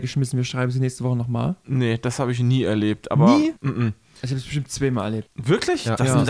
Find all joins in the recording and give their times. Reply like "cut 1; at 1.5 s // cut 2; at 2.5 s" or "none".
cut 1; at 3.6 s // cut 2; at 5.3 s